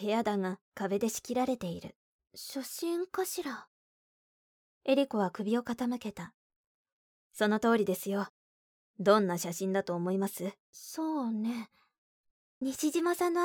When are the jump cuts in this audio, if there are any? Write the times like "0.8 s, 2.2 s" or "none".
2.2 s, 10.6 s